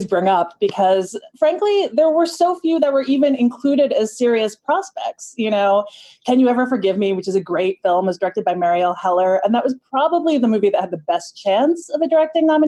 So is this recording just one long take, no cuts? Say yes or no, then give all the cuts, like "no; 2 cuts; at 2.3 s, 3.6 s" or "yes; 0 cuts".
yes; 0 cuts